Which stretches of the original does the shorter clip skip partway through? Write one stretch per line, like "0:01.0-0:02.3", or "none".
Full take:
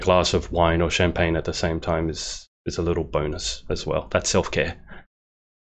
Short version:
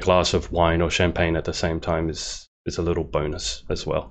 none